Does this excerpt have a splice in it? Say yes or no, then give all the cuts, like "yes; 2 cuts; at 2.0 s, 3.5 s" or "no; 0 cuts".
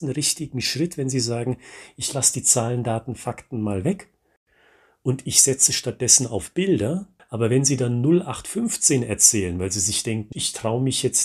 yes; 2 cuts; at 7.2 s, 10.3 s